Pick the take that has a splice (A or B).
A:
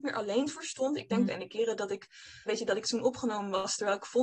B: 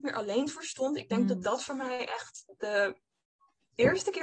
A